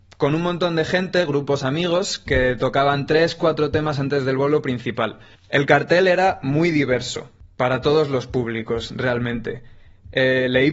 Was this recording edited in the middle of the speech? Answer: no; 0 cuts

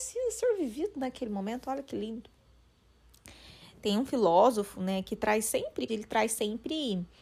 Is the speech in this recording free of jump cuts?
no; 1 cut; at 5.9 s

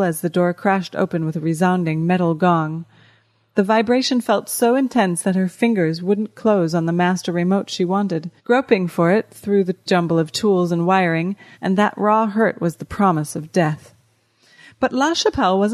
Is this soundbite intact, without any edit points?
no; 2 cuts; at 8.4 s, 11.5 s

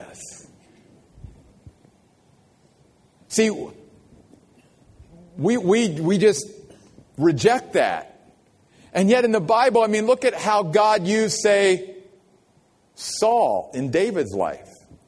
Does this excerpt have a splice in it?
no; 0 cuts

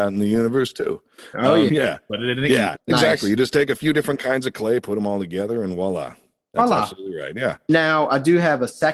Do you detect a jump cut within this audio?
yes; 2 cuts; at 1.7 s, 2.8 s

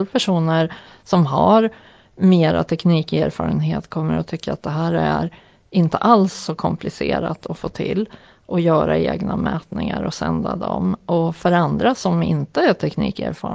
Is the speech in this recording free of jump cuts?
yes; 0 cuts

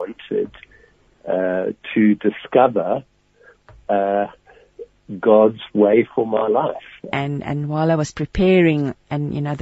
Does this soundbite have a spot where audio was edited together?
yes; 1 cut; at 7.1 s

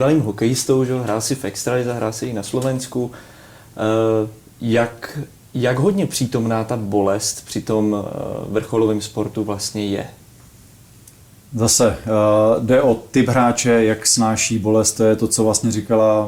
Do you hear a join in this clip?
no; 0 cuts

